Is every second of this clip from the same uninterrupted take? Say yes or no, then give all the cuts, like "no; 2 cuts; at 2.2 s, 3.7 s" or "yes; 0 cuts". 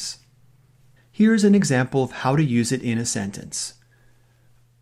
no; 1 cut; at 1.0 s